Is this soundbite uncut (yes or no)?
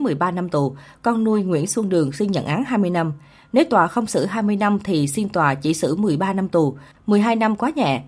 yes